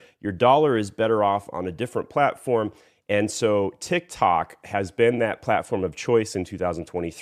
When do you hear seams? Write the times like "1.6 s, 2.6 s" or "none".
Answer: none